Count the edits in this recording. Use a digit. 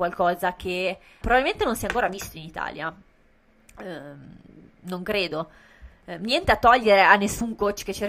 1